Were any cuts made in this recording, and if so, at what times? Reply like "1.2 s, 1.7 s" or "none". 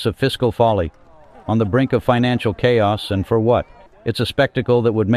3.9 s

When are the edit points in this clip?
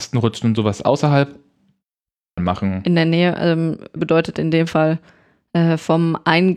2.4 s, 4.0 s

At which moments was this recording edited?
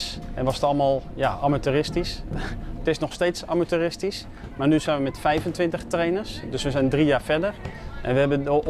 none

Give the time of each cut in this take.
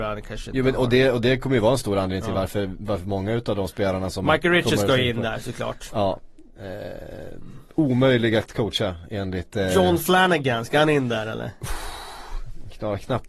none

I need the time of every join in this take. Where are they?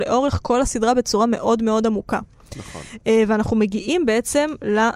none

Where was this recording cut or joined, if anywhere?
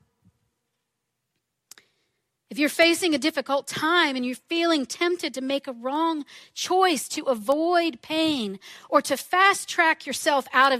none

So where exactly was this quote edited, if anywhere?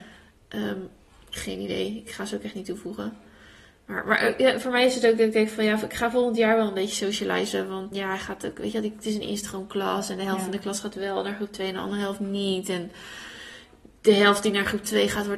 7.9 s

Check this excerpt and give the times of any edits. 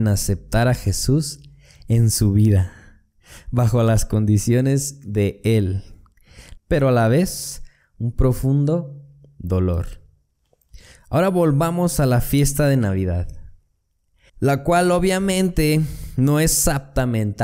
6.6 s, 14.3 s

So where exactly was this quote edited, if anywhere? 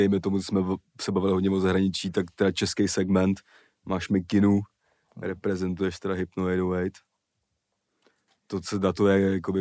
none

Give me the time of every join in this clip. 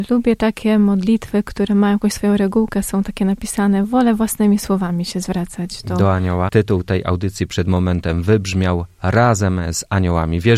6.5 s

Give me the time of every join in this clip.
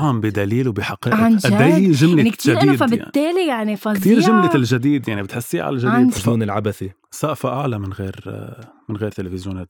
6.2 s

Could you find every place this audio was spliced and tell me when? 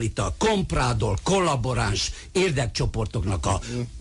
none

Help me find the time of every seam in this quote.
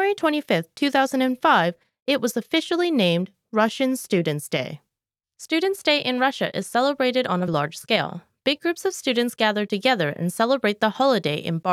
7.5 s

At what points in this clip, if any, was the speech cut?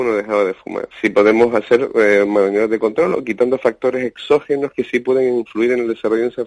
0.9 s

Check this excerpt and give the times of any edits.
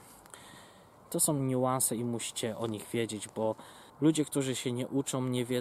1.0 s, 3.9 s

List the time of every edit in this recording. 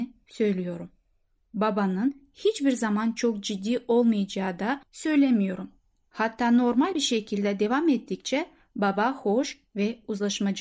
none

